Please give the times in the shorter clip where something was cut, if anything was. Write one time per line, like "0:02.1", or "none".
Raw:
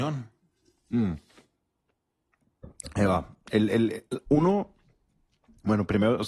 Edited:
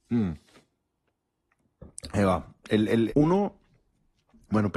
0:03.1